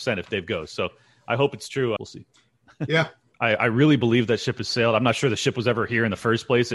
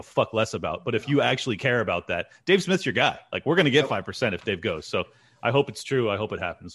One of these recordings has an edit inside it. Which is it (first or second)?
first